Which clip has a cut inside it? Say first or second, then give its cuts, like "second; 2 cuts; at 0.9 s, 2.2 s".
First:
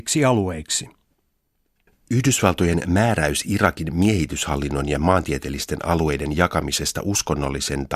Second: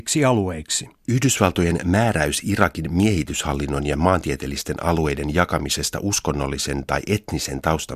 second; 1 cut; at 1.0 s